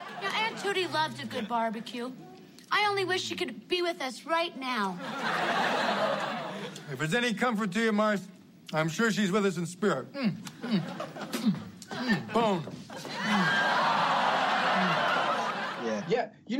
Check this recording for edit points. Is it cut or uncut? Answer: uncut